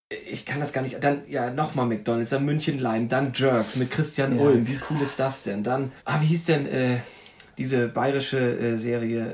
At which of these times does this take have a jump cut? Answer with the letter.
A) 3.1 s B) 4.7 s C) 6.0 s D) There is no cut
C